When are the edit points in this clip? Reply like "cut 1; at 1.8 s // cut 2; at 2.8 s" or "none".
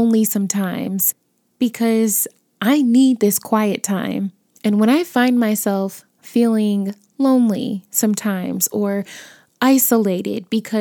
cut 1; at 4.5 s